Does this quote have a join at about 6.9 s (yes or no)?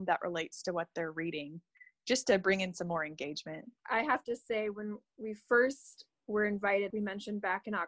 yes